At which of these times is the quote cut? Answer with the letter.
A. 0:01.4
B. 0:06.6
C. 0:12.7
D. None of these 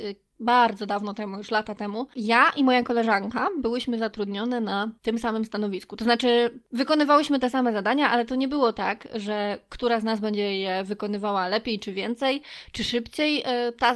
D